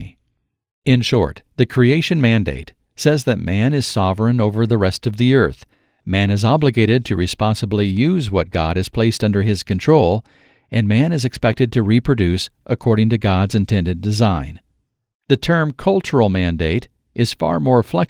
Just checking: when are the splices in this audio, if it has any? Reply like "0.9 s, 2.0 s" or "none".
none